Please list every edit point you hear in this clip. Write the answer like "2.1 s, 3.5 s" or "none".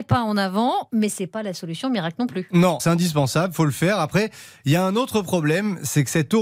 2.8 s